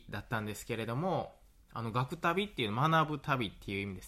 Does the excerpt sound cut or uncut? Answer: uncut